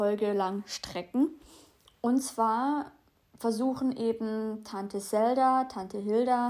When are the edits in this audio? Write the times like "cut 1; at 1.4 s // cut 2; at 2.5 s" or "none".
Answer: none